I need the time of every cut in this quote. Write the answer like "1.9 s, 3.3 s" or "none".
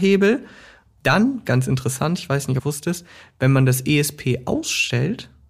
2.6 s